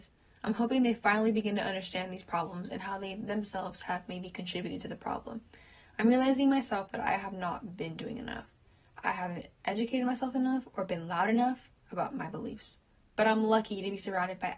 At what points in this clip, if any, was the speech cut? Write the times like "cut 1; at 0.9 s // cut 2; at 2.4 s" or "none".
none